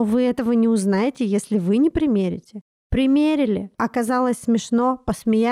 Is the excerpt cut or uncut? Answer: uncut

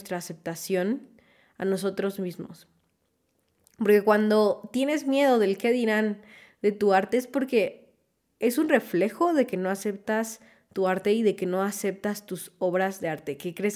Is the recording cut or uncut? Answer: uncut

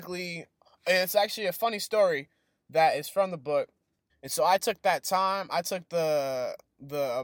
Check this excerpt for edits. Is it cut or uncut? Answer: cut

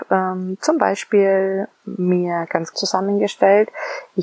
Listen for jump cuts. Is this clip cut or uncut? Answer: cut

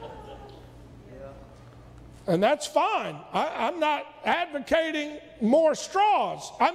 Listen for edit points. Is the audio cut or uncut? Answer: uncut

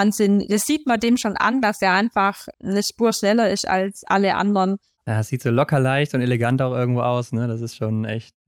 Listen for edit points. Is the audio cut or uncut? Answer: cut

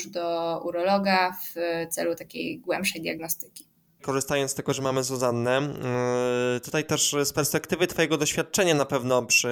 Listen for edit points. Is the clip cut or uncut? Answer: uncut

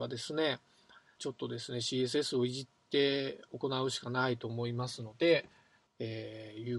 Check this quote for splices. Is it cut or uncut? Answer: cut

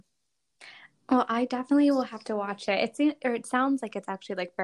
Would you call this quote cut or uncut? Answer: uncut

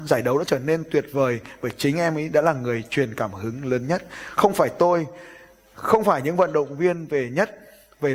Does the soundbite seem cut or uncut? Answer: uncut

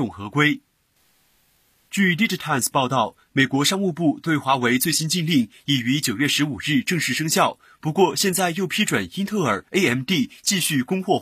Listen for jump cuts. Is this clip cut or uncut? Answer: uncut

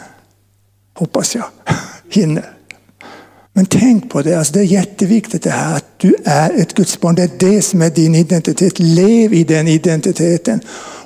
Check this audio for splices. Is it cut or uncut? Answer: cut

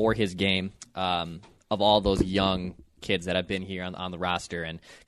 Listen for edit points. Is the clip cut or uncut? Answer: uncut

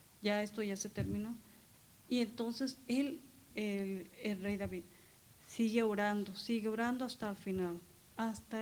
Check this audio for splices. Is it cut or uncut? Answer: cut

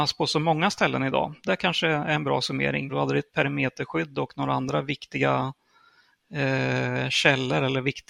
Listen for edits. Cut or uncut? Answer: cut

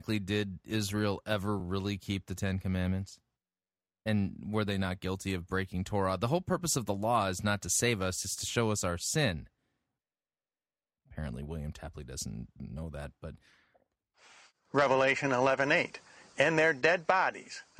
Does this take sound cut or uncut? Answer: uncut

